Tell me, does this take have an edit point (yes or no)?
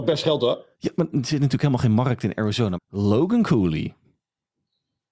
yes